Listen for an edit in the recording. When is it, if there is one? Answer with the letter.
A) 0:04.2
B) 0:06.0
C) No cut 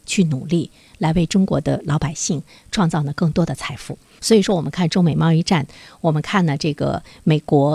A